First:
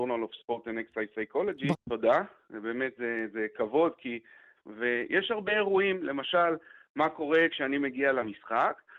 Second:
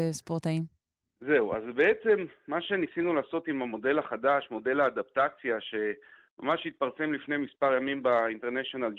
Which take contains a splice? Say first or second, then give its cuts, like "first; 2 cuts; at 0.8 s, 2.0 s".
first; 2 cuts; at 1.7 s, 4.6 s